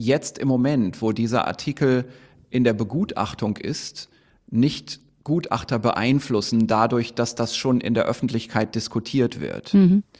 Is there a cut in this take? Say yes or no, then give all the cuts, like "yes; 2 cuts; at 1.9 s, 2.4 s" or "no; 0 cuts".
no; 0 cuts